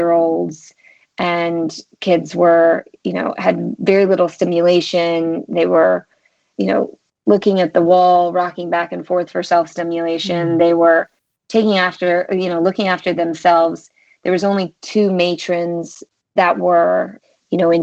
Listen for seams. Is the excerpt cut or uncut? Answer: uncut